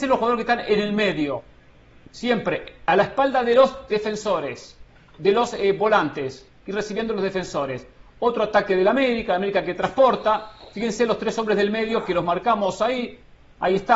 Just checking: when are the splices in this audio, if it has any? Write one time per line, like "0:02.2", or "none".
none